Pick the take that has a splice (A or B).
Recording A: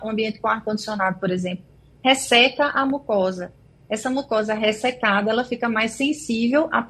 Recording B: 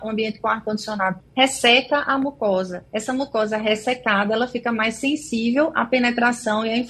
B